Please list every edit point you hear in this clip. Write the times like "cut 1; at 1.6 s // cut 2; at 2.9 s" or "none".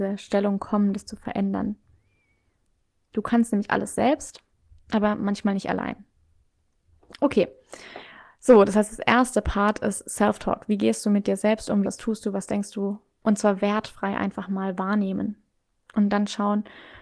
cut 1; at 11.8 s